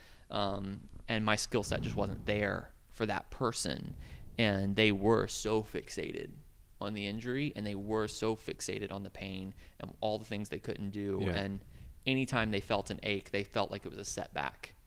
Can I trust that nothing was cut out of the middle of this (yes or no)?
yes